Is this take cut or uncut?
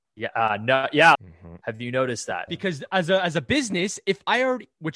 cut